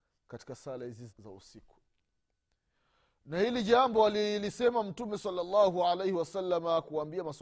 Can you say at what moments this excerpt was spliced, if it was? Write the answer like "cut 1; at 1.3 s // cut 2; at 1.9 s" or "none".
cut 1; at 1.1 s

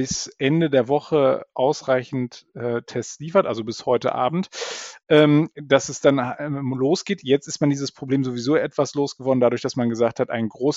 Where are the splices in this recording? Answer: none

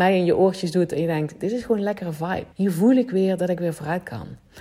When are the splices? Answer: cut 1; at 2.5 s

